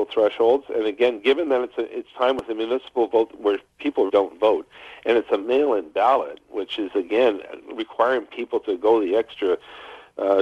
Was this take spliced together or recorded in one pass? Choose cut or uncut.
cut